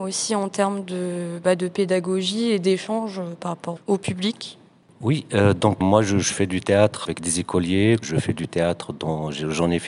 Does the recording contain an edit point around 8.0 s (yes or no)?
yes